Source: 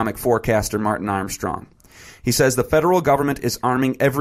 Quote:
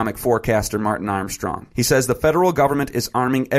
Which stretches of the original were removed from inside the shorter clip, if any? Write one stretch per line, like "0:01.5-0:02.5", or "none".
0:01.7-0:02.2